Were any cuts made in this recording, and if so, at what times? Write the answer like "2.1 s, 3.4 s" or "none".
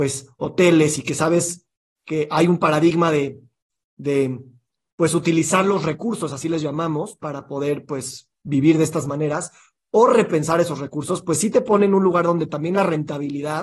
none